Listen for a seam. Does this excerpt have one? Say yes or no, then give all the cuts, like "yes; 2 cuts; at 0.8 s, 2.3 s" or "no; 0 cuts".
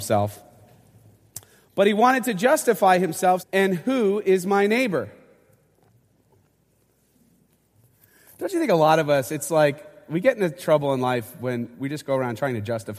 yes; 1 cut; at 3.4 s